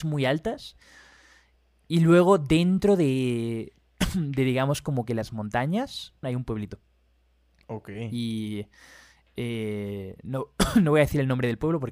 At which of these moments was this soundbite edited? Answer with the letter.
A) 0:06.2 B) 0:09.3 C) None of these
A